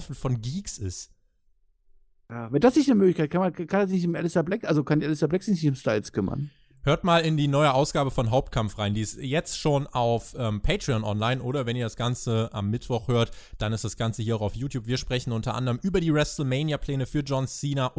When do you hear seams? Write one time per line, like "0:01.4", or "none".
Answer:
none